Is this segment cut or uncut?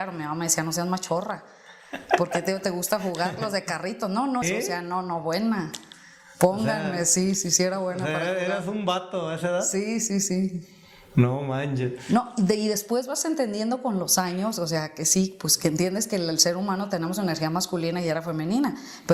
cut